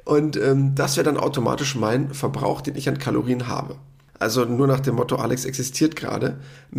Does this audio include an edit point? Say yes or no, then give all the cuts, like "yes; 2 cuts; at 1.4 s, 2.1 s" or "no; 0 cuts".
yes; 1 cut; at 4.1 s